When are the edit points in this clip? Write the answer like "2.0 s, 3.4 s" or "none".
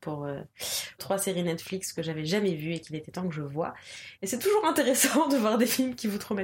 1.0 s, 4.1 s